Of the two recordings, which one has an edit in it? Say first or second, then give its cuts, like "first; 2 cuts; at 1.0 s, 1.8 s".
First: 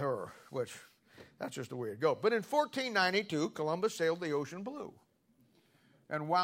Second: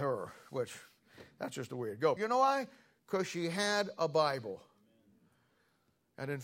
second; 1 cut; at 2.2 s